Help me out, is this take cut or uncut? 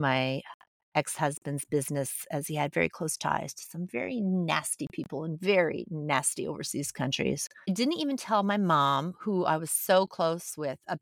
uncut